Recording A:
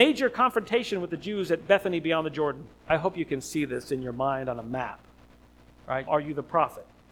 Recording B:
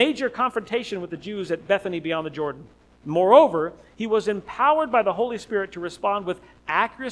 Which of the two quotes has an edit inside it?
A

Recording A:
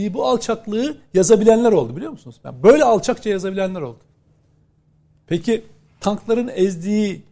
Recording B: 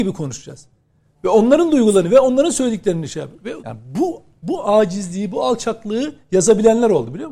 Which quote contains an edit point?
B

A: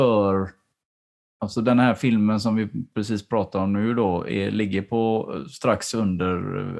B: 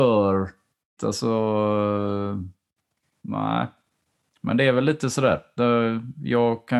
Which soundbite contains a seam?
B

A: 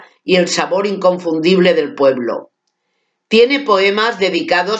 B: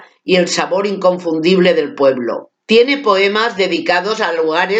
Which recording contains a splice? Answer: B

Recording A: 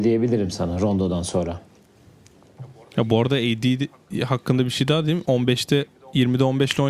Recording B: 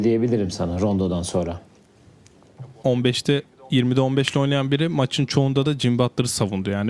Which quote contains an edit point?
B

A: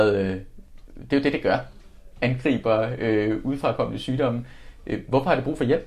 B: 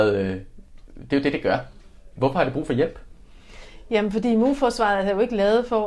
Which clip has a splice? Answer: B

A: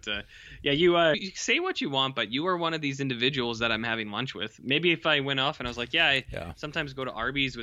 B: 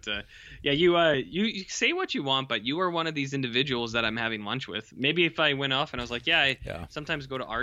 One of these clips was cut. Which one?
A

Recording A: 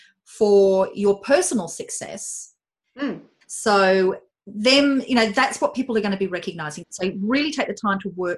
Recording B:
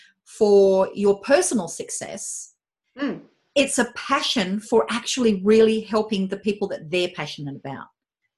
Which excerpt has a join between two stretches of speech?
A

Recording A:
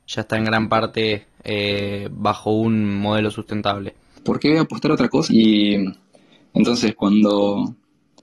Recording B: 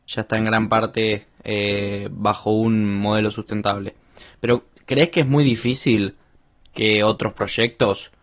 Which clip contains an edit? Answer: A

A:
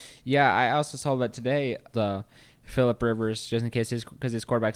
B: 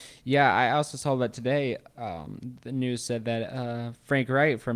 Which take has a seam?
A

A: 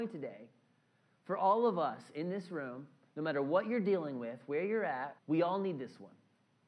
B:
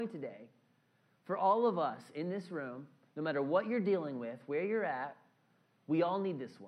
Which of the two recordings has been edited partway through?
A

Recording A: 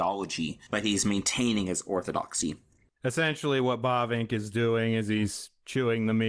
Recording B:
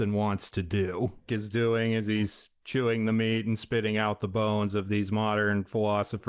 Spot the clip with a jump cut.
B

